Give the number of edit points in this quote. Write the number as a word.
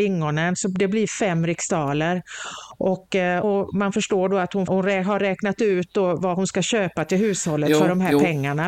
two